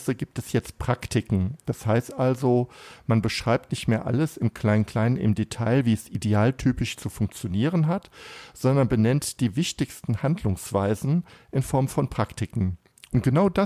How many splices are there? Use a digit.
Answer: 0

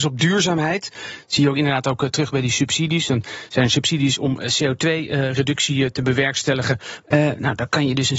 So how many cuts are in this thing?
1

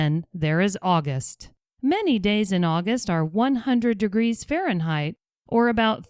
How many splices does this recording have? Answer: 1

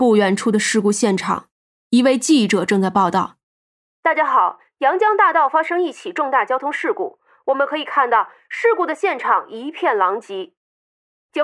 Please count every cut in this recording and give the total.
0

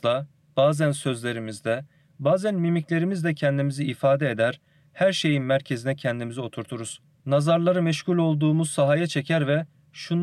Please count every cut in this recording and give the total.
1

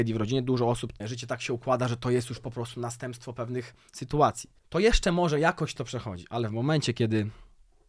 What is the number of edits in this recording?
2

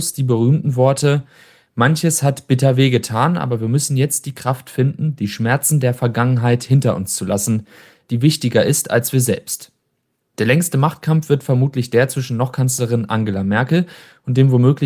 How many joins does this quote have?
1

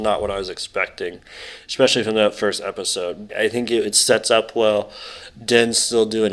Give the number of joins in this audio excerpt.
1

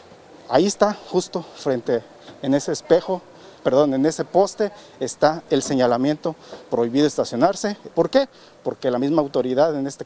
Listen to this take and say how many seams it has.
2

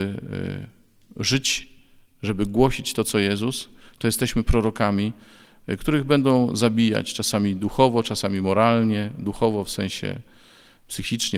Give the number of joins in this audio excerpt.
0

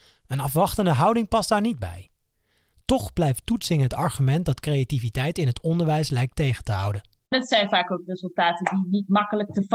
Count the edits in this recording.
1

